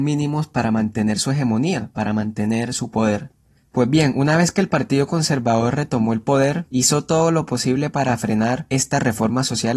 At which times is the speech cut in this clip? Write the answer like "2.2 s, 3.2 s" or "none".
none